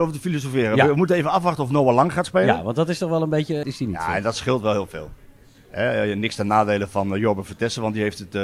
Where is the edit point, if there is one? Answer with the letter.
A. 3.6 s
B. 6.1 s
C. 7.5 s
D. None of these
A